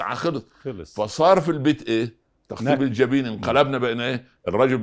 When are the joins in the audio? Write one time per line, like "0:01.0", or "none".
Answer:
none

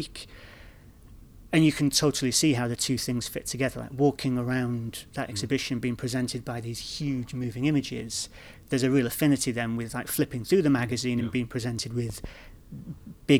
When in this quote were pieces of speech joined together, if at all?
none

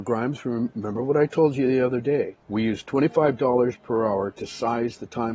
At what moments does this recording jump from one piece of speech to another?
none

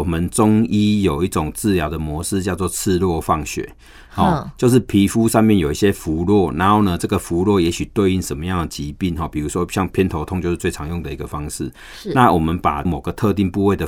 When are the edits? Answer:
none

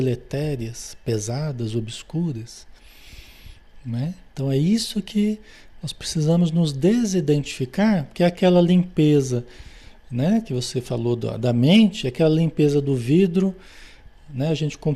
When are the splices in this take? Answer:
none

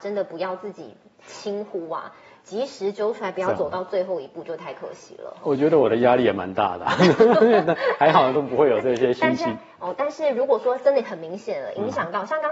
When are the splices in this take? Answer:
none

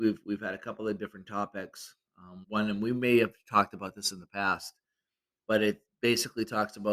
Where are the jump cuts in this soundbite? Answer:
0:02.4

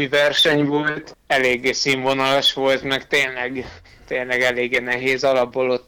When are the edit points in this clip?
none

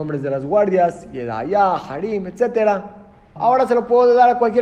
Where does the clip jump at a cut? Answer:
0:03.4

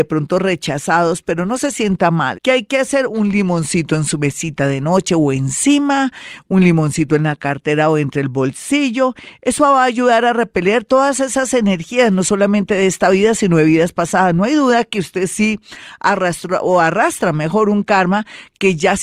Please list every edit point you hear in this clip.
0:02.3

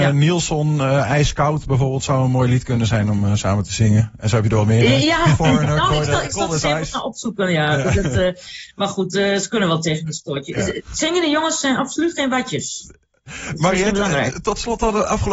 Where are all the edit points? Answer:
none

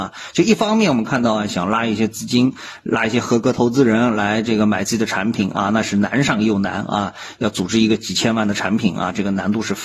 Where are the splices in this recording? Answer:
0:01.5

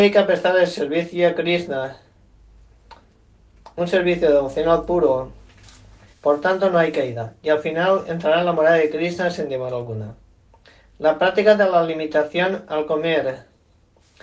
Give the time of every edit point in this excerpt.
0:06.1

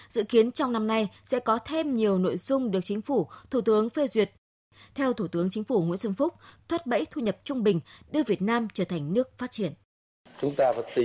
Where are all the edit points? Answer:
0:06.6

